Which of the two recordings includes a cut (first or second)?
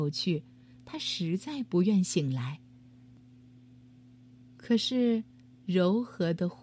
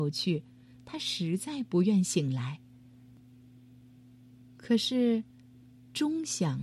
first